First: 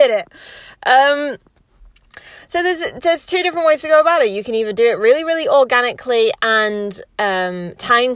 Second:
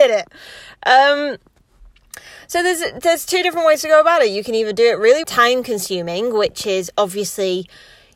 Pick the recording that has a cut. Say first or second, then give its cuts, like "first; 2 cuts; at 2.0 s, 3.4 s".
second; 1 cut; at 5.2 s